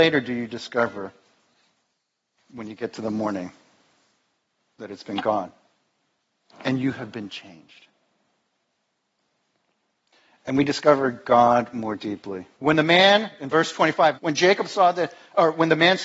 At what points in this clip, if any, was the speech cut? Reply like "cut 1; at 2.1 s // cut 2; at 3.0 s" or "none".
cut 1; at 12.5 s // cut 2; at 14.1 s